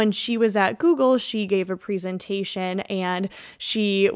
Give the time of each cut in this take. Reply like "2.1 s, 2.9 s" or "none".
none

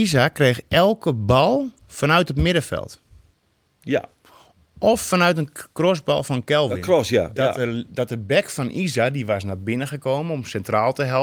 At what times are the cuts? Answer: none

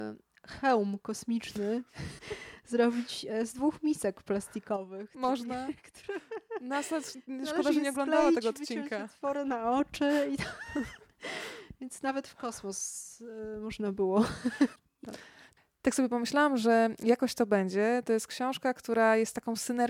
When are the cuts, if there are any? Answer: 2.2 s

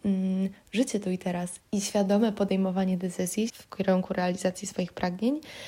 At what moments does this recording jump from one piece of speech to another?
1.6 s, 3.5 s

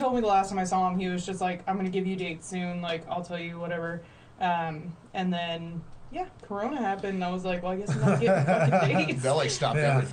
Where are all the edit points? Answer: none

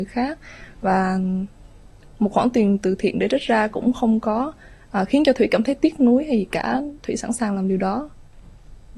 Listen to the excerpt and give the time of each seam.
none

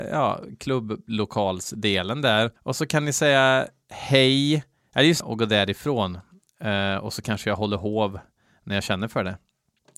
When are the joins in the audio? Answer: 2.6 s, 5.2 s

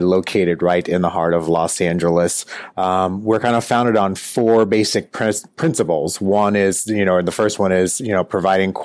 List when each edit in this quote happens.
none

